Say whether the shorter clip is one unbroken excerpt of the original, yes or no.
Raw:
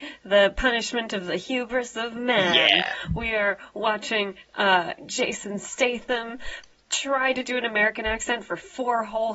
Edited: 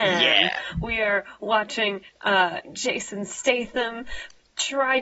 yes